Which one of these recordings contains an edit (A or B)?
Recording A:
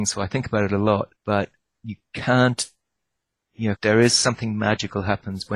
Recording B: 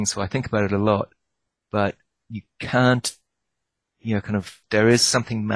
A